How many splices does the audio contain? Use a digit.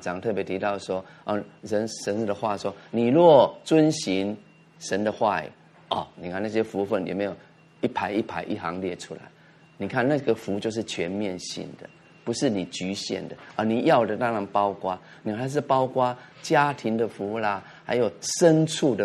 0